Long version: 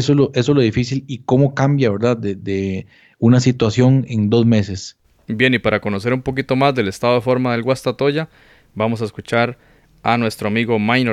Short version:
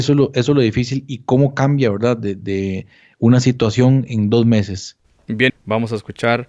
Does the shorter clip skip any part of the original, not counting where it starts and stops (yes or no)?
yes